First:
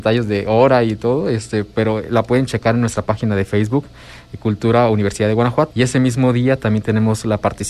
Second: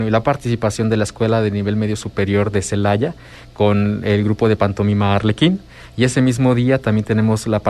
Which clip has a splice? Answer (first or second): first